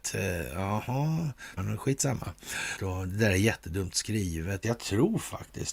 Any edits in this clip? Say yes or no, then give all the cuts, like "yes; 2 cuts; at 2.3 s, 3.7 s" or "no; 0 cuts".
yes; 3 cuts; at 1.6 s, 2.8 s, 4.6 s